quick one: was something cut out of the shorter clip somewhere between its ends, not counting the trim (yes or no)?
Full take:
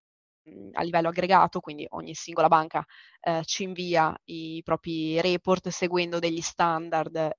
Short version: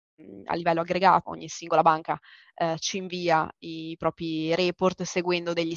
yes